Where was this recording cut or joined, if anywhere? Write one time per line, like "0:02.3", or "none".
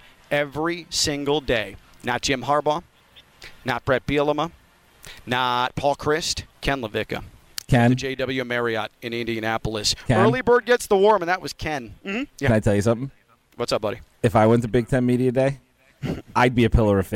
0:06.5
0:12.0